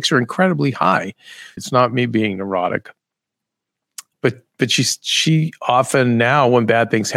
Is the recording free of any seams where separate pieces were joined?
no; 2 cuts; at 1.6 s, 4.1 s

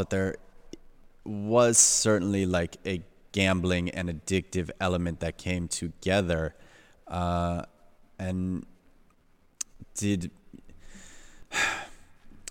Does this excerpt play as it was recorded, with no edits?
yes; 0 cuts

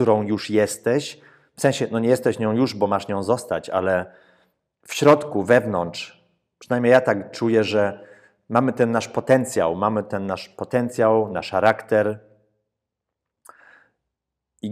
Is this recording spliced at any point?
no; 0 cuts

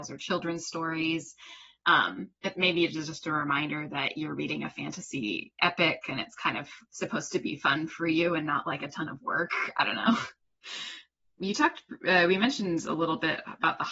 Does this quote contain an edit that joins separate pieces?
no; 0 cuts

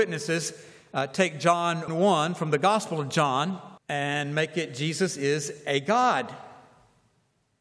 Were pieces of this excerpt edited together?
yes; 2 cuts; at 1.9 s, 3.8 s

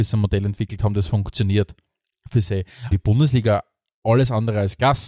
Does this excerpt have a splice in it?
yes; 1 cut; at 2.9 s

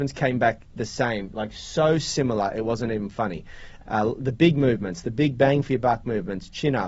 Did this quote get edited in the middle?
yes; 1 cut; at 3.8 s

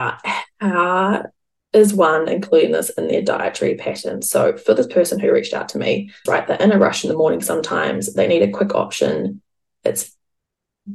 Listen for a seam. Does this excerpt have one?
yes; 1 cut; at 6.3 s

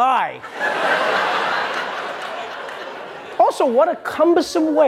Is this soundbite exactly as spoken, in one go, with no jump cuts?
yes; 0 cuts

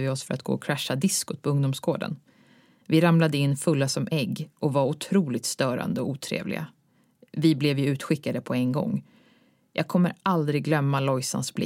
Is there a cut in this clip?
no; 0 cuts

